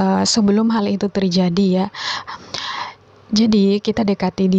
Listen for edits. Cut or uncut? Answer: cut